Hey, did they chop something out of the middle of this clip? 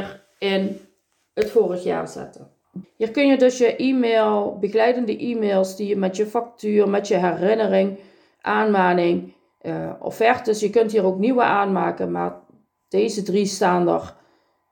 yes; 1 cut; at 2.8 s

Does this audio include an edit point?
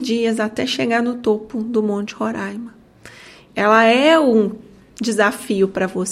yes; 1 cut; at 3.5 s

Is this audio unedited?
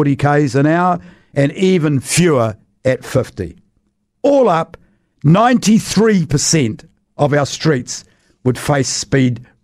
yes; 0 cuts

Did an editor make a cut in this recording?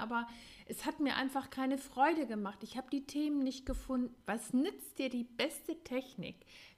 yes; 1 cut; at 4.2 s

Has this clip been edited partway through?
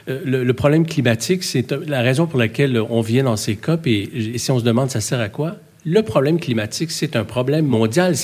yes; 1 cut; at 4.3 s

